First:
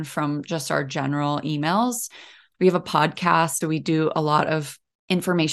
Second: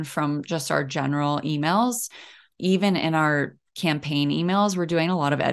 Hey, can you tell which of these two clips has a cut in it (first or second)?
first